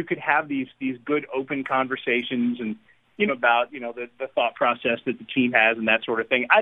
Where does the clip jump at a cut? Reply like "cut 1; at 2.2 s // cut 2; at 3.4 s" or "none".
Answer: cut 1; at 3.3 s